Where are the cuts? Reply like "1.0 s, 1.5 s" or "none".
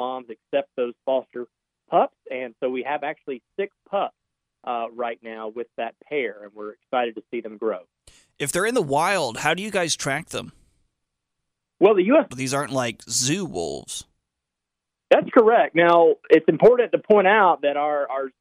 12.3 s